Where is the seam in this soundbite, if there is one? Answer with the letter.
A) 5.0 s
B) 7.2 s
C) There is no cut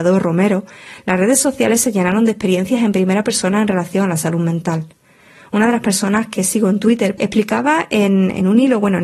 B